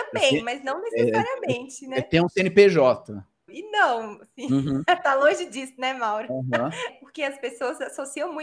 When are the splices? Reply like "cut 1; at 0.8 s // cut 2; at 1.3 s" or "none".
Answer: cut 1; at 3.5 s // cut 2; at 6.9 s